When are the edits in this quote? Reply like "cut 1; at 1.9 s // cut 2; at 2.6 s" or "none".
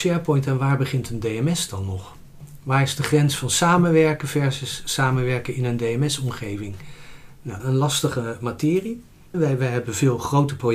cut 1; at 7.6 s // cut 2; at 9.3 s